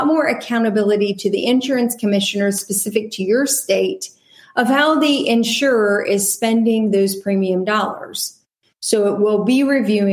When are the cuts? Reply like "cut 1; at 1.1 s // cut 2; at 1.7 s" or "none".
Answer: none

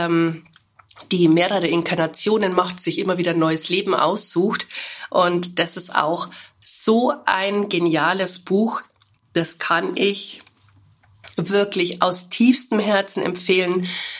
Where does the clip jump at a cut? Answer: none

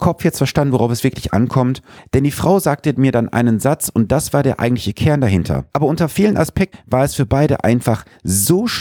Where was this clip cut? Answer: cut 1; at 2.0 s // cut 2; at 5.7 s // cut 3; at 6.7 s

